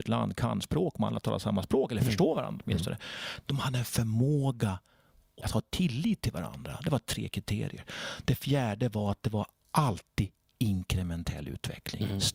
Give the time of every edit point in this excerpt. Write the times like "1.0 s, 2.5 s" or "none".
5.4 s